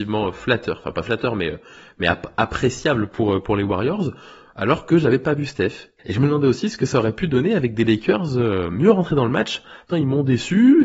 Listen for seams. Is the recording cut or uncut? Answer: cut